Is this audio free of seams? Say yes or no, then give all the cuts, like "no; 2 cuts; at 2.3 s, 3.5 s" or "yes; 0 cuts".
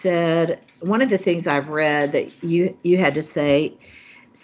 yes; 0 cuts